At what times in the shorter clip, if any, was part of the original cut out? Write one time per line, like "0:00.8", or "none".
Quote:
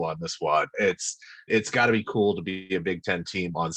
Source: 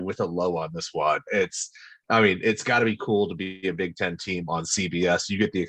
0:01.5